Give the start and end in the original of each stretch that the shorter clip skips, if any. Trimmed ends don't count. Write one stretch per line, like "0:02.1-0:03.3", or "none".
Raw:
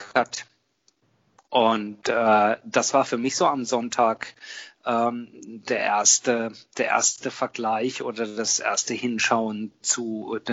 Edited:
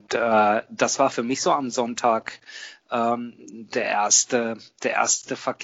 none